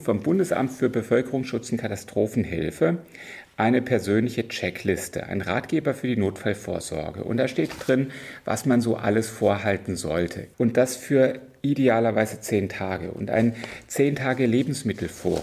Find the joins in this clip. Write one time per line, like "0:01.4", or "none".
0:10.5